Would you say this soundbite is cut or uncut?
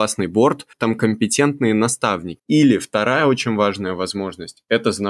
cut